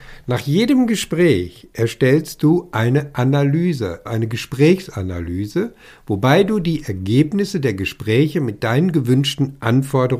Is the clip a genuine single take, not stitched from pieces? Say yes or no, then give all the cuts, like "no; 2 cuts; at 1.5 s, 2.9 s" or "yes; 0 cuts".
no; 1 cut; at 4.1 s